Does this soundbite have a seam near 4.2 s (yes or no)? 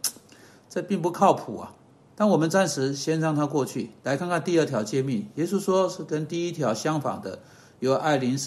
no